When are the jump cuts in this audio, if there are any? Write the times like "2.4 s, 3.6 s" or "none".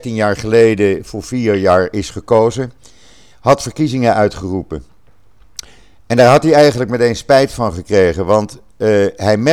none